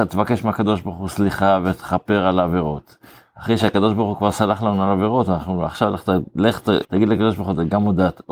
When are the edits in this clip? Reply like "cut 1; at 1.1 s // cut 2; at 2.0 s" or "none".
cut 1; at 6.8 s